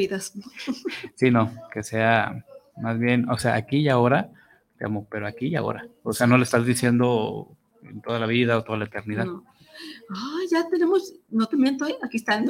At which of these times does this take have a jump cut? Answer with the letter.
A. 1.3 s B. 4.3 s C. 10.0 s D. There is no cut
D